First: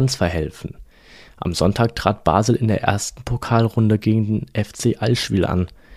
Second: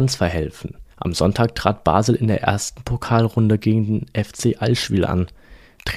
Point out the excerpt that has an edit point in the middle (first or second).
second